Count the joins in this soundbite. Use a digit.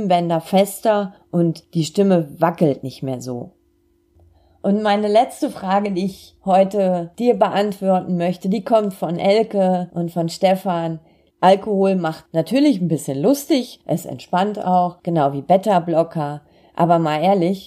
1